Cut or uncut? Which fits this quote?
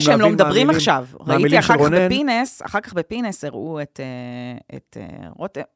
uncut